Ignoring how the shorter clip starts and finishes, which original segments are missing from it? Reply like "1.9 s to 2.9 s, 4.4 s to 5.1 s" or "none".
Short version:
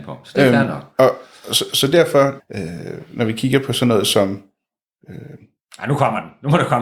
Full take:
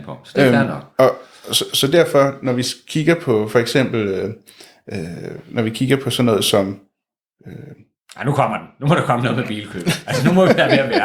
2.4 s to 4.8 s